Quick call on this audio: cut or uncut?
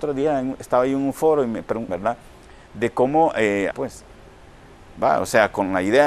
cut